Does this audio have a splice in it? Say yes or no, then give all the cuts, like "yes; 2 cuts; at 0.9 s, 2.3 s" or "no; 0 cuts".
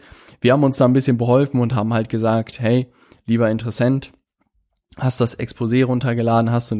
no; 0 cuts